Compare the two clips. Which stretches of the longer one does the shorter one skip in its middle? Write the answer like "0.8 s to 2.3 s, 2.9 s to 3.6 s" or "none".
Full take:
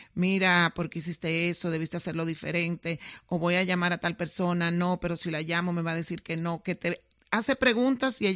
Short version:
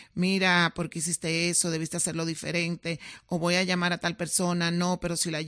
none